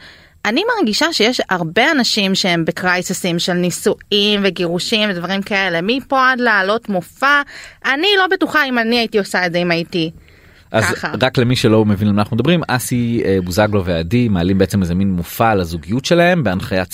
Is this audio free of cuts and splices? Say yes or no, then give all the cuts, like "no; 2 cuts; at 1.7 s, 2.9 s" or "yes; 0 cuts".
yes; 0 cuts